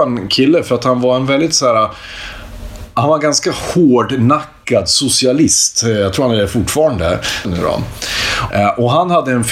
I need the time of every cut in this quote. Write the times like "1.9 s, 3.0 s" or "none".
7.4 s, 8.5 s